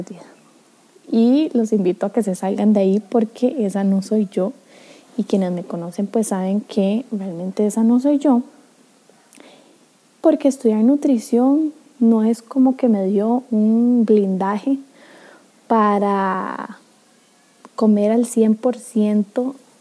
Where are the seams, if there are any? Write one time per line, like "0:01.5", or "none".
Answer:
none